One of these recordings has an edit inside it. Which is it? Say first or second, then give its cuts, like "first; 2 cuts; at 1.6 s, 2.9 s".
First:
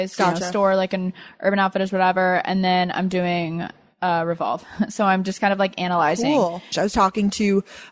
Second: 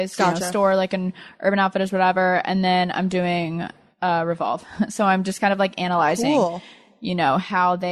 first; 1 cut; at 6.7 s